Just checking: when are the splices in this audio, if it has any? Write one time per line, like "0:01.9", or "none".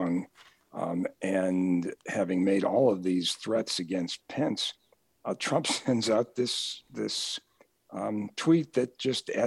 none